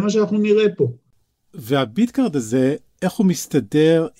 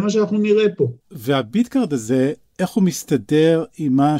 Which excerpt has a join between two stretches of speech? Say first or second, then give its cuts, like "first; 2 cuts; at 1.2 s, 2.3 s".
second; 1 cut; at 1.0 s